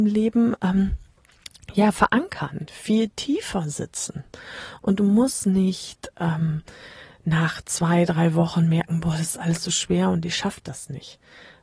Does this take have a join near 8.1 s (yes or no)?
no